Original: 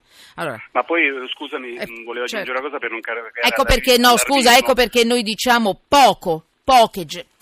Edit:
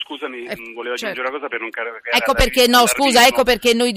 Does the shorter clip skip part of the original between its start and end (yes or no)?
no